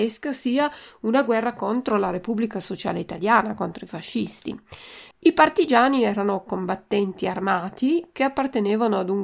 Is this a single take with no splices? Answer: no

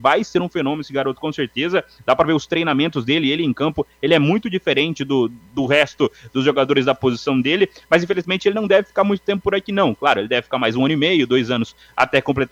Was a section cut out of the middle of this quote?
no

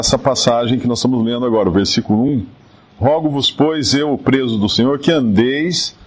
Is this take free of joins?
yes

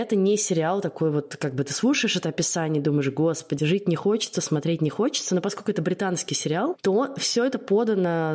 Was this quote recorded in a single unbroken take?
no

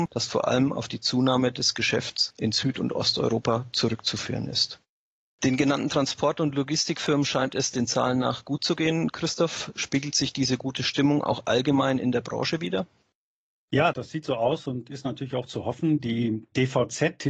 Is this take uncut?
no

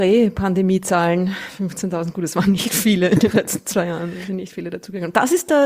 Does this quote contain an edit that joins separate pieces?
no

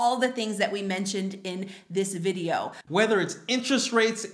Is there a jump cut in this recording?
yes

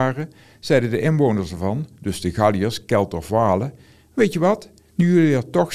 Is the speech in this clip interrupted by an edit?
no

